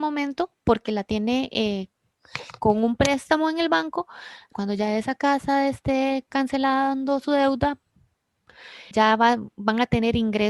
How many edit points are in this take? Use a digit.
2